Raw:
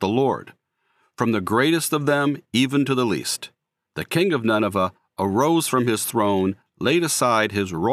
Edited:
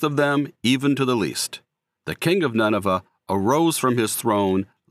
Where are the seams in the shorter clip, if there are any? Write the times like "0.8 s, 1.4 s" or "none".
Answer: none